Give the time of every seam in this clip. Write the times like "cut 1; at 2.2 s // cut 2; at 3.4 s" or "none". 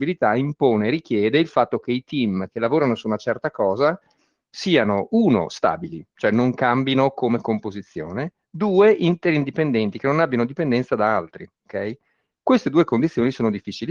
none